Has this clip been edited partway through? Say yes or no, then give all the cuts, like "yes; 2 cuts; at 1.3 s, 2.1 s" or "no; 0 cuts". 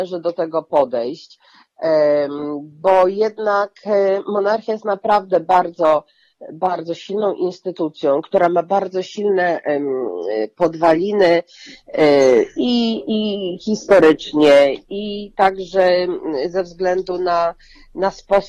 no; 0 cuts